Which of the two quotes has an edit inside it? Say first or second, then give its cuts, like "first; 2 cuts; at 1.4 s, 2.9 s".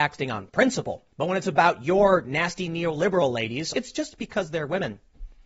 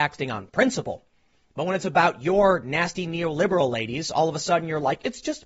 first; 2 cuts; at 1.1 s, 3.7 s